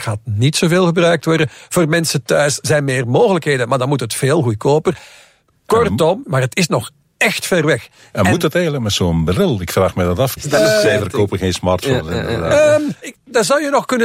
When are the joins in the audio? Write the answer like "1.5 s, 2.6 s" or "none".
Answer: 6.3 s, 10.4 s, 13.0 s